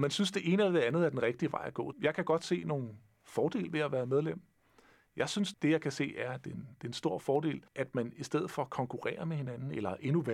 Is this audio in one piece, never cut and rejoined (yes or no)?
no